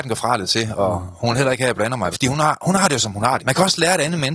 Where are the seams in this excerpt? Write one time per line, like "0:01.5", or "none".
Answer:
0:02.1
0:03.4